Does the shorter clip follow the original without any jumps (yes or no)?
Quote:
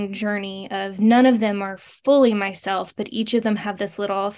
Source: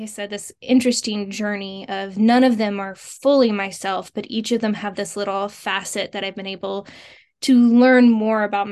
yes